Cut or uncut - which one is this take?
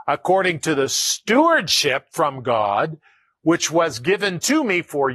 uncut